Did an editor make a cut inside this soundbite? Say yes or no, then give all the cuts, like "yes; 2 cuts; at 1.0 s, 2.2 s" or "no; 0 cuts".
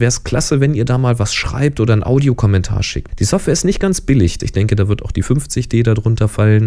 yes; 2 cuts; at 3.1 s, 4.4 s